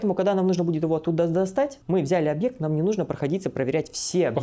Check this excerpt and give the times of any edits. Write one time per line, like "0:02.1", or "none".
0:01.8